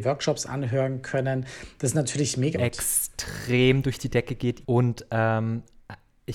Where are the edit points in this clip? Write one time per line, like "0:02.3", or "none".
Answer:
0:02.5
0:04.6